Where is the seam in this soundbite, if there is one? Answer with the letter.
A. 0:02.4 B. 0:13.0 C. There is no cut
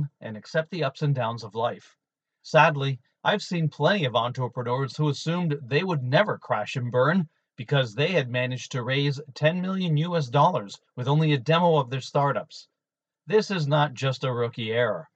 A